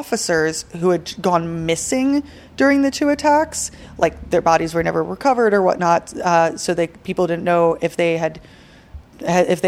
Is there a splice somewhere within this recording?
no; 0 cuts

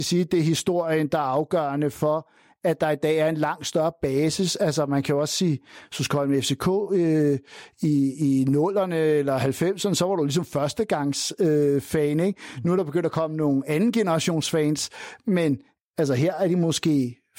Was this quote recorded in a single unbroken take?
yes; 0 cuts

